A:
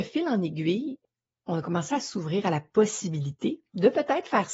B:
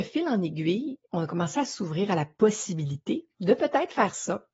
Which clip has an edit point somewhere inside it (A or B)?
B